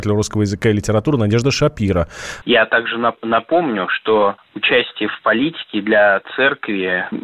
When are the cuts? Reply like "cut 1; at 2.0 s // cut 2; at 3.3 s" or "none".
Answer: cut 1; at 2.4 s